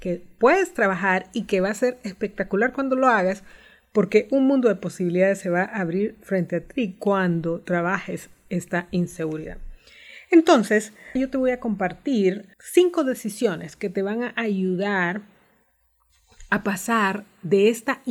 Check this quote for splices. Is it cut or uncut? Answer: cut